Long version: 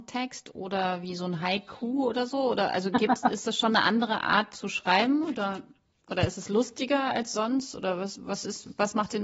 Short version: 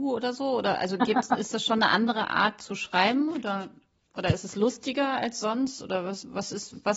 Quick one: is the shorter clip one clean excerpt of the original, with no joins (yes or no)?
yes